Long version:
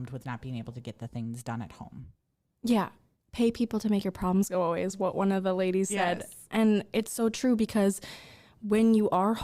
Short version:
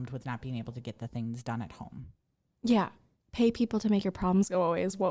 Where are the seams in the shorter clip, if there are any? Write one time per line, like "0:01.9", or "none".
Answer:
none